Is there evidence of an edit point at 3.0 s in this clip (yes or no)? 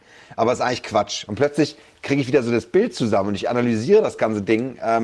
no